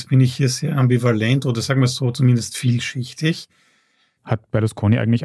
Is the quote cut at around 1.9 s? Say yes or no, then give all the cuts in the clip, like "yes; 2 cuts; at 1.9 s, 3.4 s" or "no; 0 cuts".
no; 1 cut; at 4.2 s